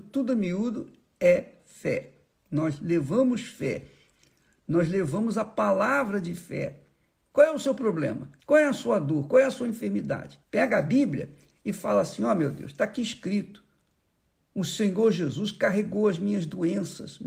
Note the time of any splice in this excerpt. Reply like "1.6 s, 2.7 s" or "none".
7.3 s, 8.4 s, 10.4 s